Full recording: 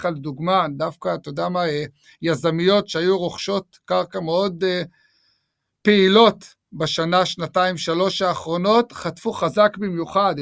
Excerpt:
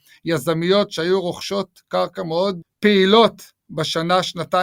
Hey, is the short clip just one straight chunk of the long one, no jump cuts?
no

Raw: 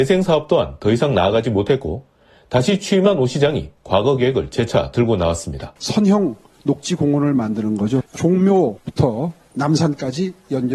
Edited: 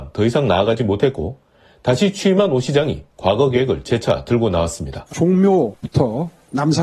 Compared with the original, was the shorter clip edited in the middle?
yes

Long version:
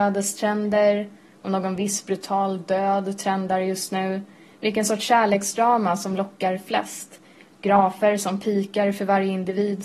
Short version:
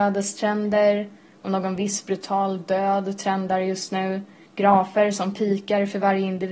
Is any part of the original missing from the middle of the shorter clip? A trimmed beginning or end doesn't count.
yes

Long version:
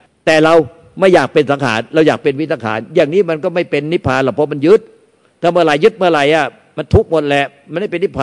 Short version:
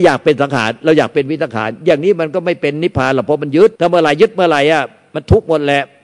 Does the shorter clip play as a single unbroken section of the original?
no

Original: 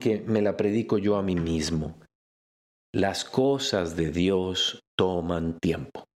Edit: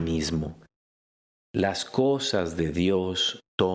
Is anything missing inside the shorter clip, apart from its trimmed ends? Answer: no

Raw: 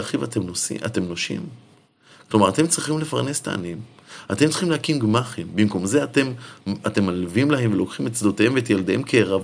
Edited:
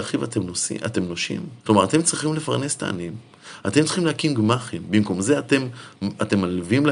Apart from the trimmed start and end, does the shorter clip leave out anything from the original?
yes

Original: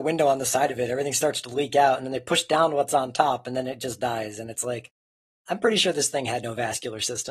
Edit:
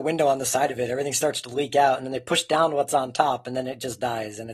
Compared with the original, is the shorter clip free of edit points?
yes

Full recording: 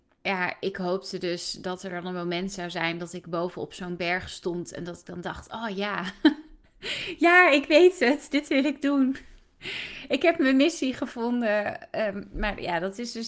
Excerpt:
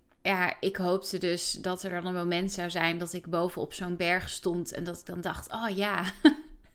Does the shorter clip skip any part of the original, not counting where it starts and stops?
no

